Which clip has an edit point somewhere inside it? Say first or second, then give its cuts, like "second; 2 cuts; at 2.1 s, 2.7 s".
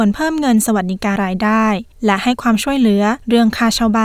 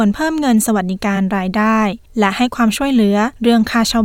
first; 1 cut; at 1.2 s